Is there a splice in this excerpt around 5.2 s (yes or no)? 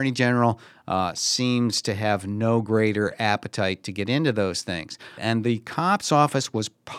yes